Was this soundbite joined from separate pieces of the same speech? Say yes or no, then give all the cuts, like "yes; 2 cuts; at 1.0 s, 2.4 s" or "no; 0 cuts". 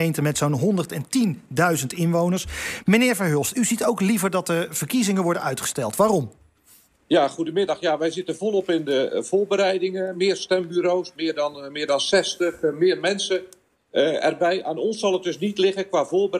no; 0 cuts